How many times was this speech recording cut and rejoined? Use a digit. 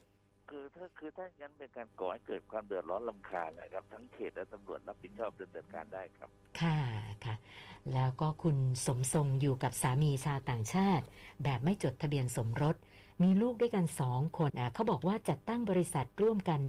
1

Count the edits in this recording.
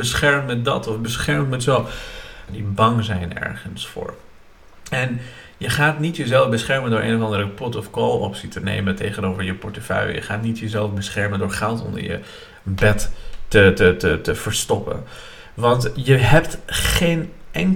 1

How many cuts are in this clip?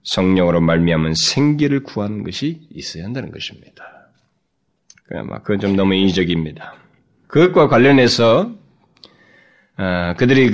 2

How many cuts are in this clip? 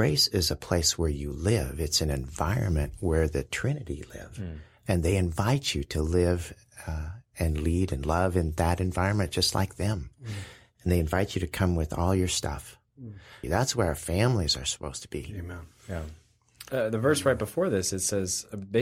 1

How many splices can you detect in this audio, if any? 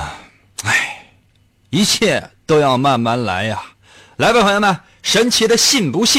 0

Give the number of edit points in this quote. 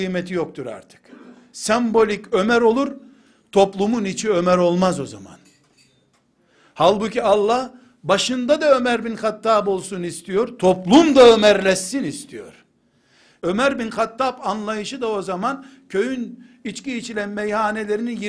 1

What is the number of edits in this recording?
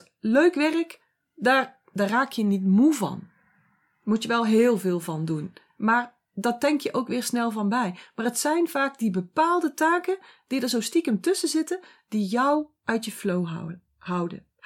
0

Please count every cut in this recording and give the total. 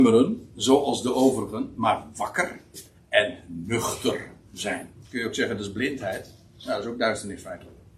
1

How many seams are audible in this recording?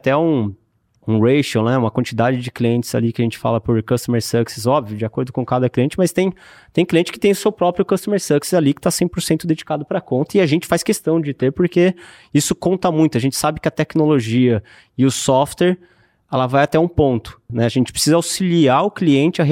1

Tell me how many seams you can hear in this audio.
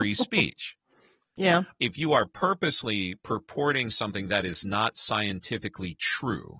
1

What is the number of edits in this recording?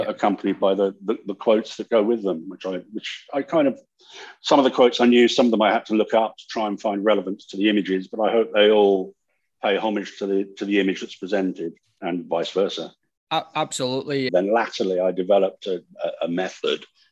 2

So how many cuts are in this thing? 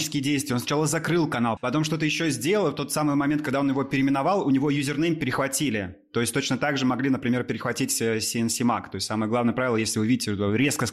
1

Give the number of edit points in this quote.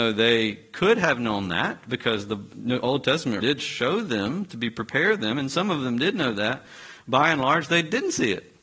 1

